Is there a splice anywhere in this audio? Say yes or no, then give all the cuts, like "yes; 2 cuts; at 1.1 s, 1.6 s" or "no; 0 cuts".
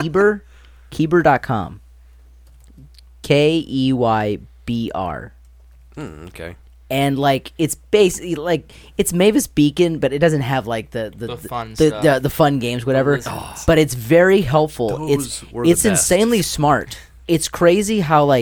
yes; 1 cut; at 17.2 s